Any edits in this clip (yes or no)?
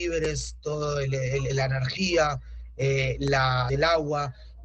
yes